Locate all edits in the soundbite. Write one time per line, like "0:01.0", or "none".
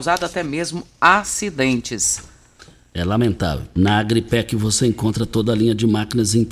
0:03.7